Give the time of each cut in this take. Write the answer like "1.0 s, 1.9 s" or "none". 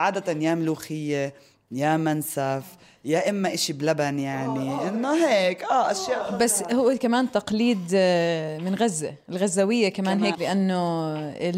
10.3 s